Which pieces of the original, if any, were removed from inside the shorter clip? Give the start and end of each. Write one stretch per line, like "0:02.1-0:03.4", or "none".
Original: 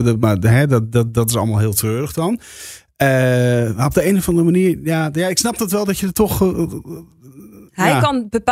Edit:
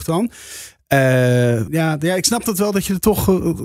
0:03.8-0:04.8